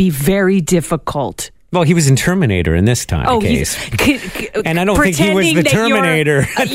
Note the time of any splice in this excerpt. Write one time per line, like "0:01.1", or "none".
none